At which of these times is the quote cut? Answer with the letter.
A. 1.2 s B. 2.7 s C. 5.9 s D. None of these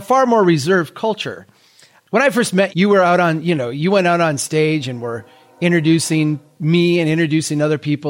B